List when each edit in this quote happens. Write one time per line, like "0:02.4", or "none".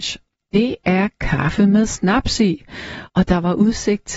0:03.1